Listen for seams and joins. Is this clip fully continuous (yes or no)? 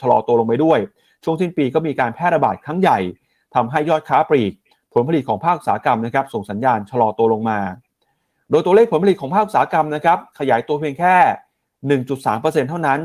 yes